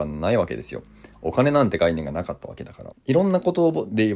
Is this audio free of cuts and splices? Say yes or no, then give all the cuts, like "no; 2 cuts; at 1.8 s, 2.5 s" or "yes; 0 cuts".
no; 1 cut; at 2.9 s